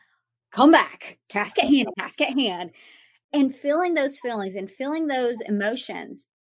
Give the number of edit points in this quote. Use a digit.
1